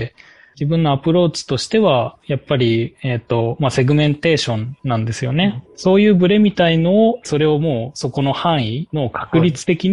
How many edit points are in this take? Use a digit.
2